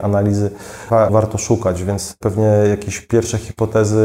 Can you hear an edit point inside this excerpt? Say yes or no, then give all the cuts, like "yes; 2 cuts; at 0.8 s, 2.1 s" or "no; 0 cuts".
yes; 1 cut; at 1.1 s